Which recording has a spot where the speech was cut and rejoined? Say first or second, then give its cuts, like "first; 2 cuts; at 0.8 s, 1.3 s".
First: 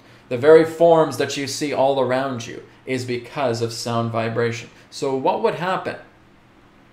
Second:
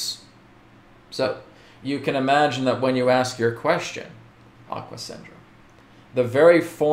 second; 1 cut; at 4.7 s